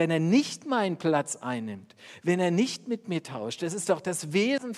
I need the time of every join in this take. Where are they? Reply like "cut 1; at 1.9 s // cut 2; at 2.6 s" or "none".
none